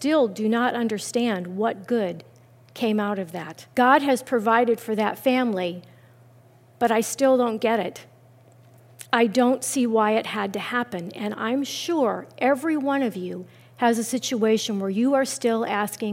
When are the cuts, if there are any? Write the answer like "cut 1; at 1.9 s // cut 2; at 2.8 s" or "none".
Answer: cut 1; at 3.7 s